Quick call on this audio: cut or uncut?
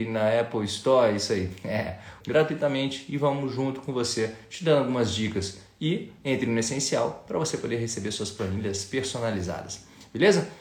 cut